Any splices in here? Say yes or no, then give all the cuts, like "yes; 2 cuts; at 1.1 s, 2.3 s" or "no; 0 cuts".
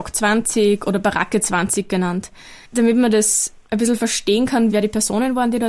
yes; 2 cuts; at 2.6 s, 4.7 s